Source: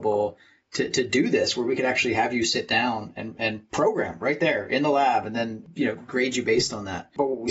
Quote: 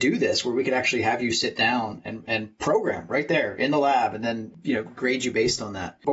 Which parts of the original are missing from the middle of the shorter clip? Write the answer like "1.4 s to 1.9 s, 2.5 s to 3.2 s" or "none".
none